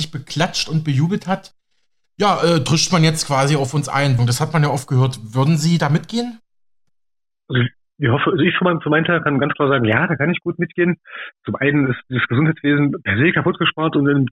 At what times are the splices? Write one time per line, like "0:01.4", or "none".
0:04.2